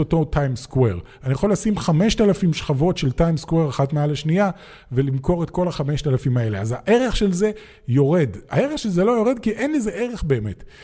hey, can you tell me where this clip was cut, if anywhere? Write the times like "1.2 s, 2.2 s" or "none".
none